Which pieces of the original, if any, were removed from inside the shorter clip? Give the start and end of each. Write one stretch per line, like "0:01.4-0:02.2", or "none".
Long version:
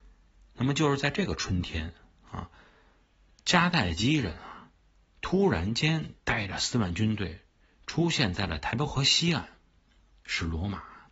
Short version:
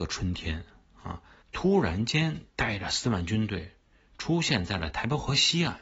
0:02.7-0:05.1